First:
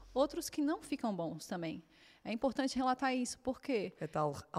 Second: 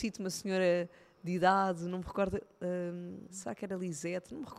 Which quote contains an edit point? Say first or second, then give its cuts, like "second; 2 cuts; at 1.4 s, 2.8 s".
second; 1 cut; at 3.3 s